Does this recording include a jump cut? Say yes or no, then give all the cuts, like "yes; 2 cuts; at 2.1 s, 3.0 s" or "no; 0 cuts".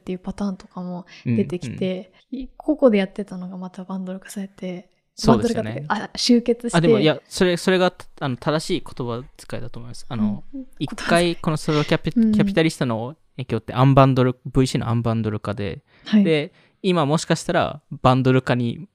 no; 0 cuts